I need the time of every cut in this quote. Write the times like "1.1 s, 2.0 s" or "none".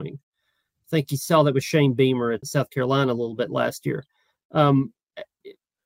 2.4 s

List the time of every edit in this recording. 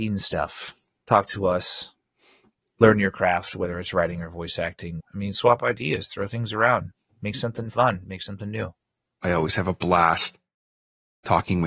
5.0 s, 9.2 s

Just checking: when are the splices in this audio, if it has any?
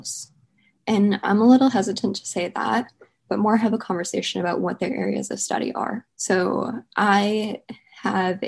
3.3 s, 6.1 s

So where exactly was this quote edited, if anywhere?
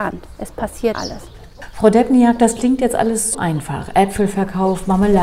0.9 s, 3.3 s

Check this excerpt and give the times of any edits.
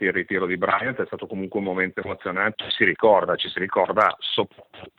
2.5 s

